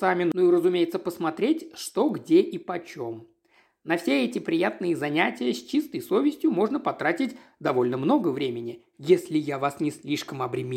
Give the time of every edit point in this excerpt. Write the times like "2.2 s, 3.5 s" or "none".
8.9 s